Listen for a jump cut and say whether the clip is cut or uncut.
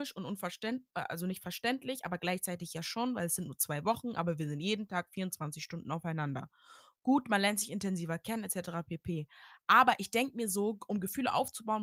uncut